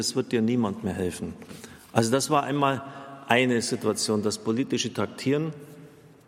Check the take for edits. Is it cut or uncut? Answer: uncut